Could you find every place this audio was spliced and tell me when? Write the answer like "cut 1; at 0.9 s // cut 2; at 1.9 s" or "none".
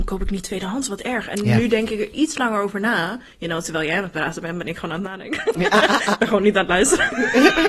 none